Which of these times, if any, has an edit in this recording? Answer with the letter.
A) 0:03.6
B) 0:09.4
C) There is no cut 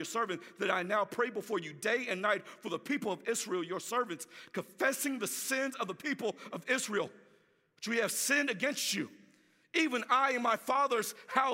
C